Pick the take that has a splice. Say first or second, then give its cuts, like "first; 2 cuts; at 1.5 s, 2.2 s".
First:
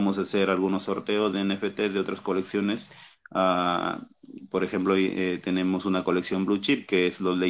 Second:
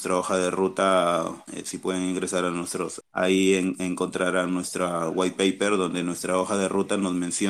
second; 2 cuts; at 1.5 s, 3.0 s